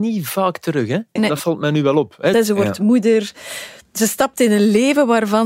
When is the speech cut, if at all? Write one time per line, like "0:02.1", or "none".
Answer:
0:01.2
0:02.3